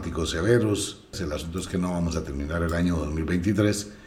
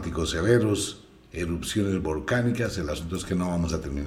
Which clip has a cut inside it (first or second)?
first